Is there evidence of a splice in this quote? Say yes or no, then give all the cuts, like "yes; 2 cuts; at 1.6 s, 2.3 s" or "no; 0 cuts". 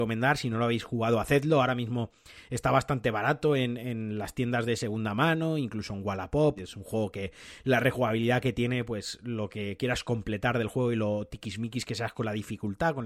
yes; 1 cut; at 6.6 s